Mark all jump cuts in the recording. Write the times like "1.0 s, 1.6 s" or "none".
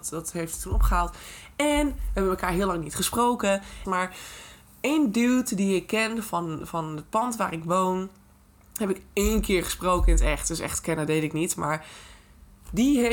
3.8 s